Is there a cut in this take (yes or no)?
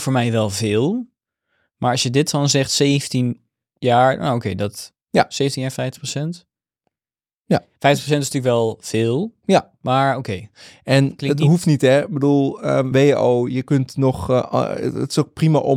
yes